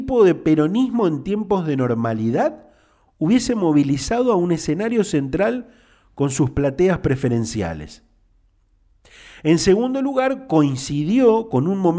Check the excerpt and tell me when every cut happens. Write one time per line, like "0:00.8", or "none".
none

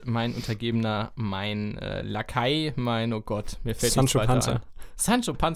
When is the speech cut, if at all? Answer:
none

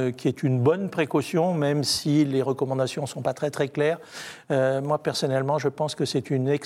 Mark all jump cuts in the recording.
none

